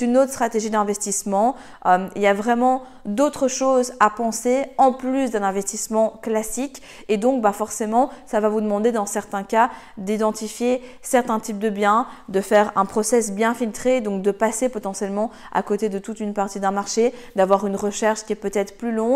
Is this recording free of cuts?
yes; 0 cuts

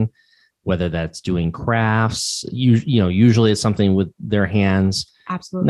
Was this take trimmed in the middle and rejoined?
no; 0 cuts

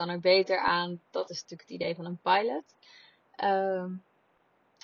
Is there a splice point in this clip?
no; 0 cuts

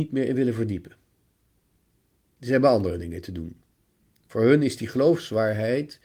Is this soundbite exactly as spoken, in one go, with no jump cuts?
yes; 0 cuts

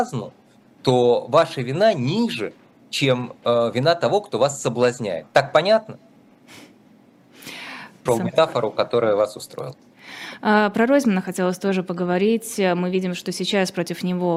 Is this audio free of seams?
no; 1 cut; at 8.1 s

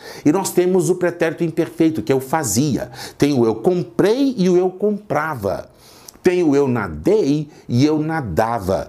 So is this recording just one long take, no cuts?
yes; 0 cuts

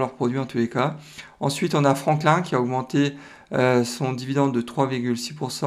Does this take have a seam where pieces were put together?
no; 0 cuts

